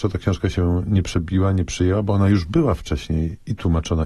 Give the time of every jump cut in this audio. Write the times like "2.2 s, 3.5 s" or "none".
none